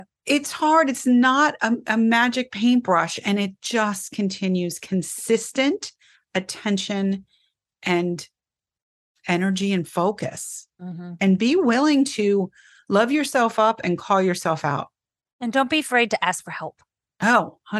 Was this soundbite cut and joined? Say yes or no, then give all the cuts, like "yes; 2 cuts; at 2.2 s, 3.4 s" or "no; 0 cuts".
no; 0 cuts